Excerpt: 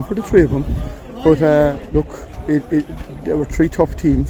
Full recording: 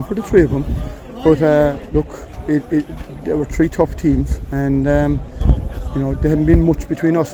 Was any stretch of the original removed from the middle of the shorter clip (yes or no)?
no